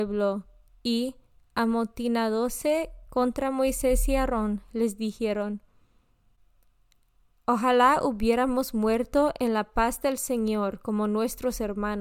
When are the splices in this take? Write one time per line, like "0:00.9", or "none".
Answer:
none